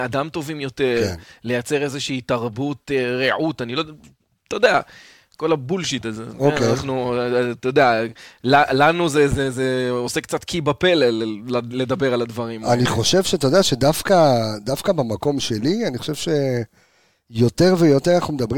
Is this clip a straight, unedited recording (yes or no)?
yes